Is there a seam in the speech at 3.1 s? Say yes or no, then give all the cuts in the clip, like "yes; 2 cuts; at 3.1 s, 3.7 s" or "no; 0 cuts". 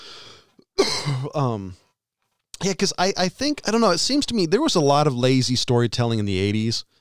no; 0 cuts